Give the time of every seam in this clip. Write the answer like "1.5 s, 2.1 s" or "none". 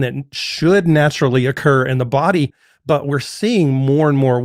none